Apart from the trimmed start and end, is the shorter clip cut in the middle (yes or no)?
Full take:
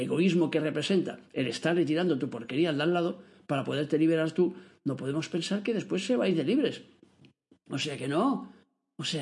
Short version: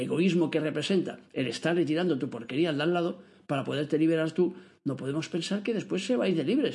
no